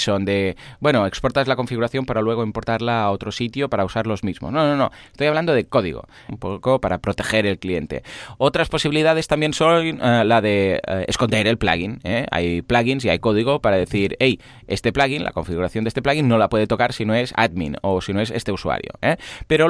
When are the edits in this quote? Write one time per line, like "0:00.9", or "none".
0:06.3